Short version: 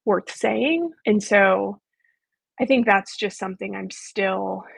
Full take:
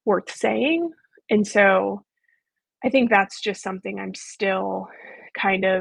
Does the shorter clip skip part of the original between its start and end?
yes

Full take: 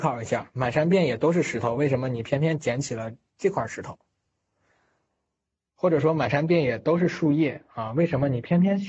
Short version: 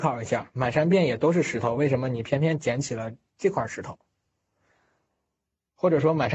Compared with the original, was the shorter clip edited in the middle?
no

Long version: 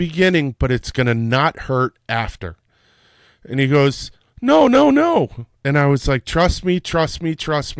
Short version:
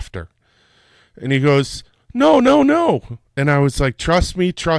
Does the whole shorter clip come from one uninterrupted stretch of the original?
yes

